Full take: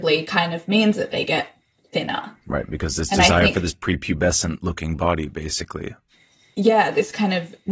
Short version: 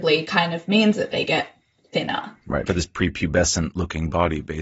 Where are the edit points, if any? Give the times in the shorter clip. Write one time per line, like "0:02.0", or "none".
0:02.7